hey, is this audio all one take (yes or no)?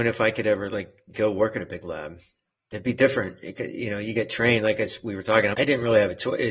no